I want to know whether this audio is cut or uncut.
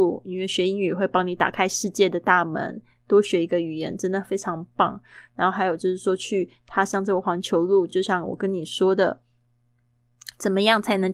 uncut